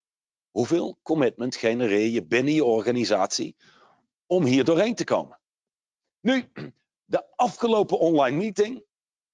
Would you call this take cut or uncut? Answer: uncut